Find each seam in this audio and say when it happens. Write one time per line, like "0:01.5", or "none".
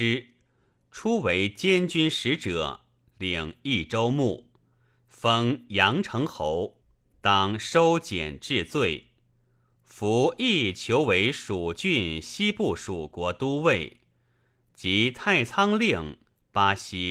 none